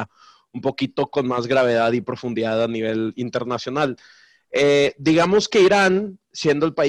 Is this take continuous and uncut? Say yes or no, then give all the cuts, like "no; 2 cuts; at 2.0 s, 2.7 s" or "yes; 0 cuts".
yes; 0 cuts